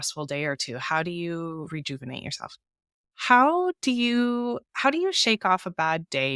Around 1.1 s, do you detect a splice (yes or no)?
no